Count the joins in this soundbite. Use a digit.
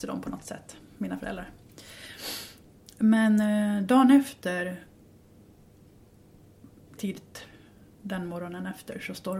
1